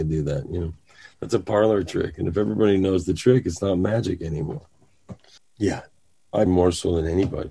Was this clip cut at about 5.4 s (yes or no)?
yes